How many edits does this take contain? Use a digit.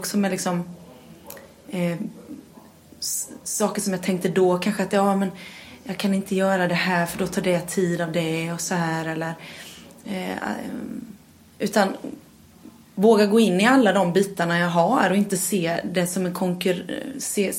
0